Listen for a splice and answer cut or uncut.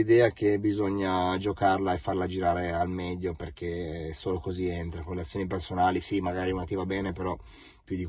uncut